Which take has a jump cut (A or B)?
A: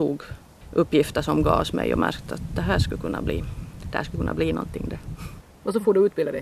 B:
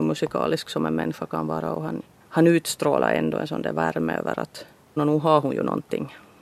B